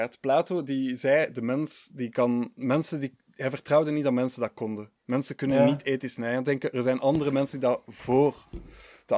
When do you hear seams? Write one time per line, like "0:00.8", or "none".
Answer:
none